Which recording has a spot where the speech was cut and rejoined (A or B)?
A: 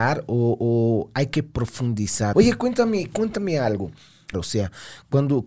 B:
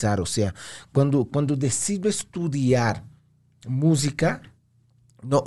A